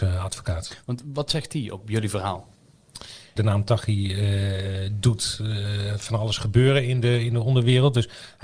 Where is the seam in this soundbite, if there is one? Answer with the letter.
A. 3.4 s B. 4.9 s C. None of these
A